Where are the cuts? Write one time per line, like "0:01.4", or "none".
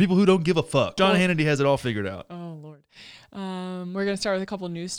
0:01.0